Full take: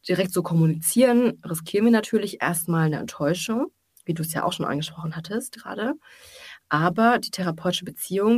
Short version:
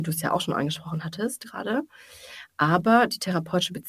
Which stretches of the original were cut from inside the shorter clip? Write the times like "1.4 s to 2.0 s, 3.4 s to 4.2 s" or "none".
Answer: none